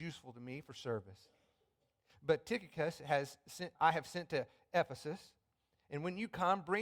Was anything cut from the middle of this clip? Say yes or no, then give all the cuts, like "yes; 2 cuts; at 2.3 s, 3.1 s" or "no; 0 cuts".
yes; 1 cut; at 3.7 s